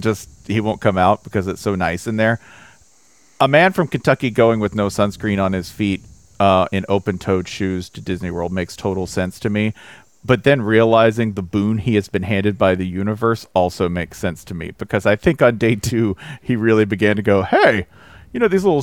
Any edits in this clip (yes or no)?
no